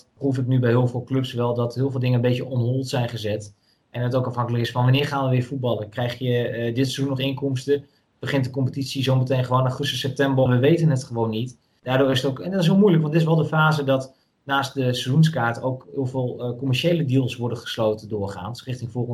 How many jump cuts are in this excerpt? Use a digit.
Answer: 2